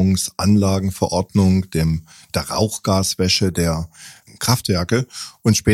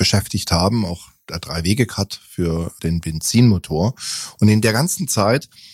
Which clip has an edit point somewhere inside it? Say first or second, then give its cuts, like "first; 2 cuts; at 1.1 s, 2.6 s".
first; 1 cut; at 4.3 s